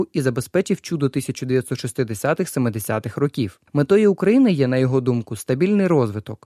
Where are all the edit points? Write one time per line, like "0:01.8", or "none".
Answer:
0:03.7